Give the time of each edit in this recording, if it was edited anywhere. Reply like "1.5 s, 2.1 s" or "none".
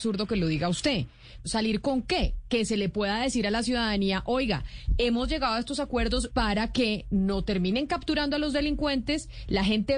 1.4 s, 6.3 s